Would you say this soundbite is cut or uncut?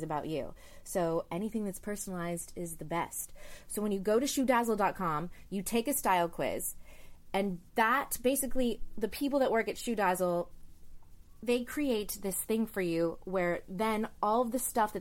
uncut